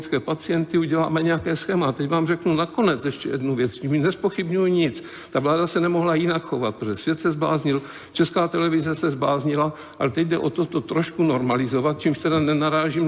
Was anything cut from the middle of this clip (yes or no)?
no